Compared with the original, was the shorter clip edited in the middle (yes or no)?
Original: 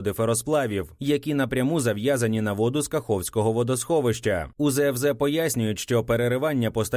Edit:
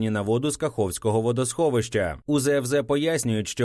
no